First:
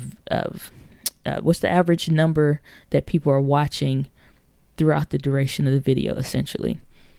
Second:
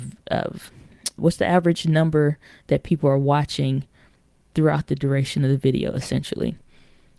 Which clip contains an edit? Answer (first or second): second